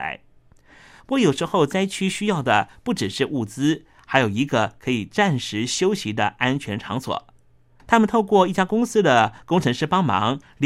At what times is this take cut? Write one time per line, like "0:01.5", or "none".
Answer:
0:07.8

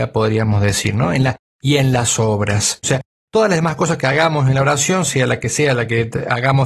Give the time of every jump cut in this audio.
0:02.8

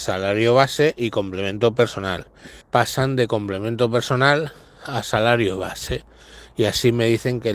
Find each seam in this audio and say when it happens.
0:02.6

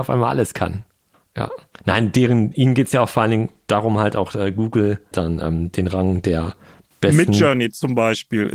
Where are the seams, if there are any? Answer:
0:05.1

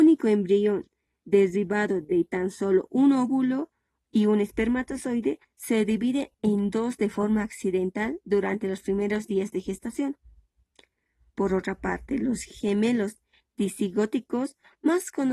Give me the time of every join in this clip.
none

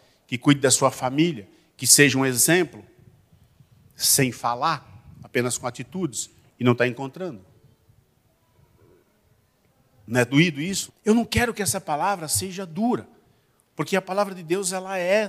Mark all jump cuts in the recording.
0:10.9

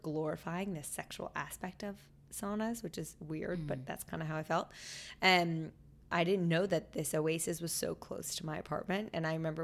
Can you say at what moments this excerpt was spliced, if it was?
none

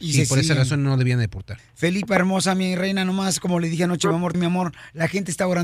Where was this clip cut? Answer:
0:01.6
0:04.3

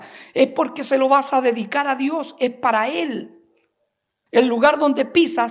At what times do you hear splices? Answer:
0:04.3

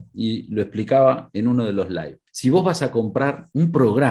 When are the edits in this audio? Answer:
none

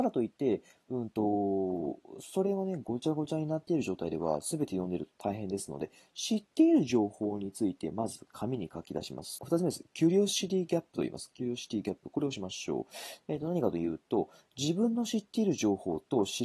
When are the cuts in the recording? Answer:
0:09.4

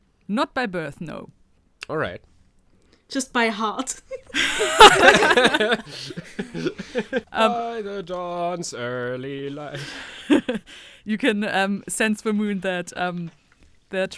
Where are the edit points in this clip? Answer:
0:07.2

